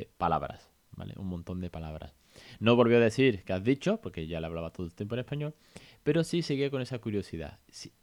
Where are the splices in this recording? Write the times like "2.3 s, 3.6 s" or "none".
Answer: none

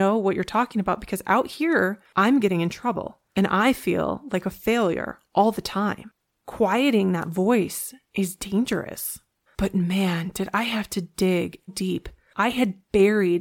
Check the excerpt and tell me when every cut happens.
9.5 s, 11.7 s

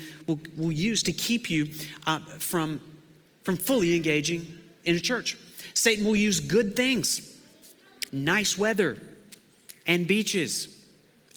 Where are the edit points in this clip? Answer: 8.1 s

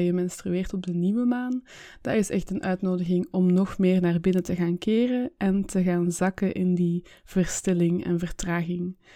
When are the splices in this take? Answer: none

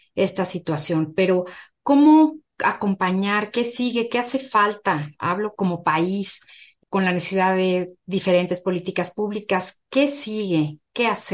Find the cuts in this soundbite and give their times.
5.6 s

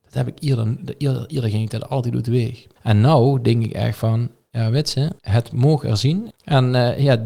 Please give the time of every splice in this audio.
2.8 s, 5.2 s, 6.3 s

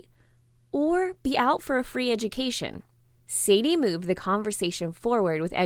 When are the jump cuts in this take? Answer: 3.1 s

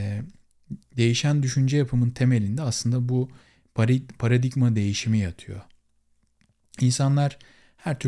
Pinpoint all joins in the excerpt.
none

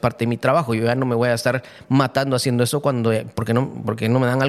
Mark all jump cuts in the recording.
none

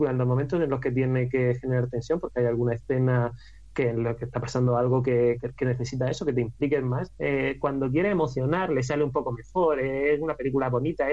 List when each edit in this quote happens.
7.2 s

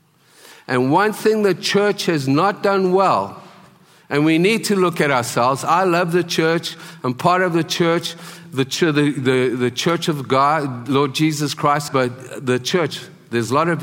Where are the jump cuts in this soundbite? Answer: 11.9 s

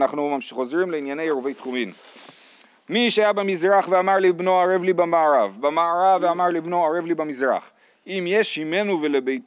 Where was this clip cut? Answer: none

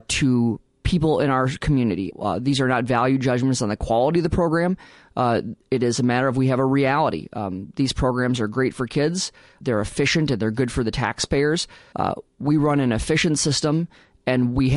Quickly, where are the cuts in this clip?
2.1 s, 9.6 s, 11.9 s

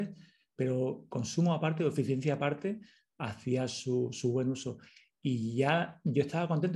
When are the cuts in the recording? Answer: none

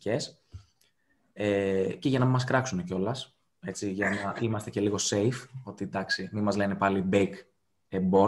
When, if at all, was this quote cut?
none

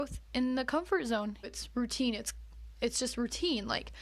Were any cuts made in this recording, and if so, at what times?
1.4 s

